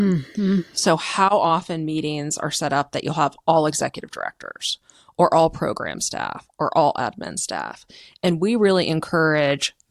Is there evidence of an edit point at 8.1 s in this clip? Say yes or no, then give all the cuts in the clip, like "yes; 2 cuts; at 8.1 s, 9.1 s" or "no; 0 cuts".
no; 0 cuts